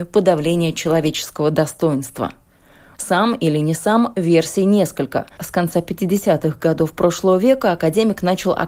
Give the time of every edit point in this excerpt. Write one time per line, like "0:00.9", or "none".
0:02.9
0:05.4